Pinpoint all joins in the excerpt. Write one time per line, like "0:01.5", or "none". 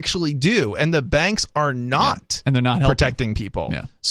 none